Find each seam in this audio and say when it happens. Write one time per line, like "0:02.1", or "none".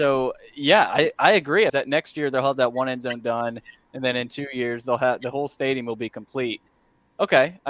0:01.7